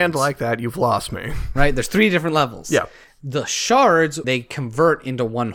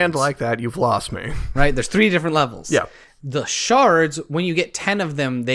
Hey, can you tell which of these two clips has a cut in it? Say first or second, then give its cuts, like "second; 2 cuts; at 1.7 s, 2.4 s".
first; 1 cut; at 4.2 s